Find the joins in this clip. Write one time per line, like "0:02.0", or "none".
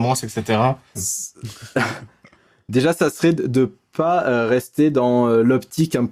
0:01.0

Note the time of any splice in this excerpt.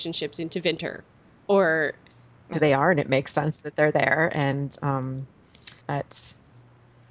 0:02.5
0:05.8

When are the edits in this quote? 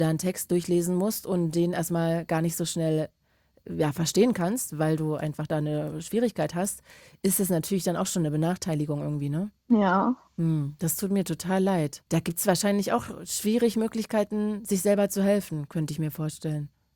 0:09.6
0:12.1

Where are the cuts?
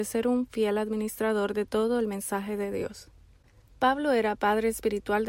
none

